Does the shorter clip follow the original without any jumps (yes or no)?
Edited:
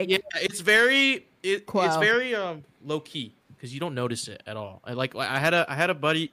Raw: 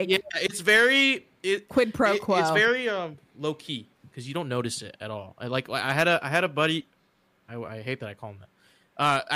no